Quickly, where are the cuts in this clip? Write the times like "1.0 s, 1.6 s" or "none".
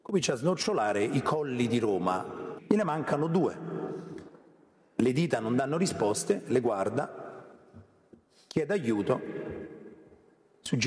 2.6 s